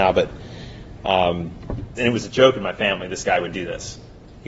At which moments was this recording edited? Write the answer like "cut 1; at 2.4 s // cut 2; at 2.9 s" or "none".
cut 1; at 2.0 s